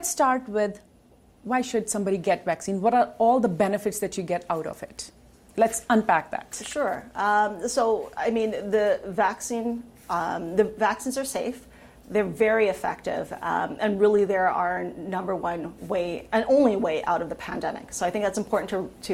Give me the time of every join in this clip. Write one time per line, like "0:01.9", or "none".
none